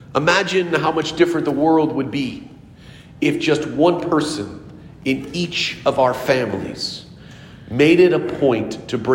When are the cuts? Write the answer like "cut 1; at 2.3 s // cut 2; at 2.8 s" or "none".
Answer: none